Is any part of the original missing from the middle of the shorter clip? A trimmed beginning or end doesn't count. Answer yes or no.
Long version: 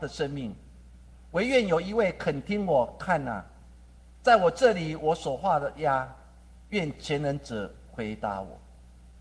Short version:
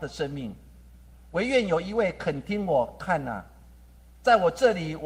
no